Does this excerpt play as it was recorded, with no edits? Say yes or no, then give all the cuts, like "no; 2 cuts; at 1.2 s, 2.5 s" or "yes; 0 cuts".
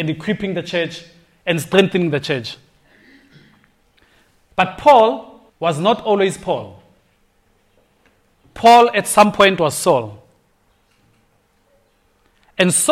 no; 1 cut; at 5.5 s